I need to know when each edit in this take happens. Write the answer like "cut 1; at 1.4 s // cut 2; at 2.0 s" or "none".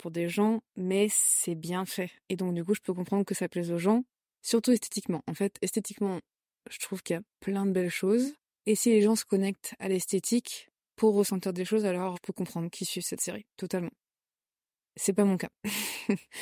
none